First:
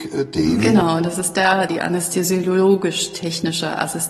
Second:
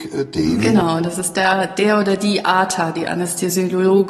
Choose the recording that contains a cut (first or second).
first